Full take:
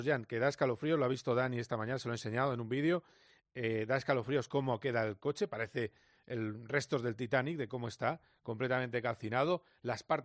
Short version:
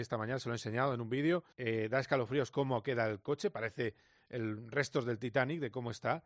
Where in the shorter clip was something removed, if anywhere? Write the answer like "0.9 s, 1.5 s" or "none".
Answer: 1.5 s